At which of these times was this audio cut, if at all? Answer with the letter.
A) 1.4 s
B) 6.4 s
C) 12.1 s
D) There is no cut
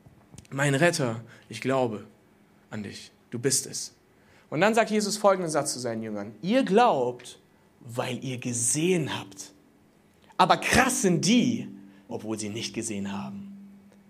C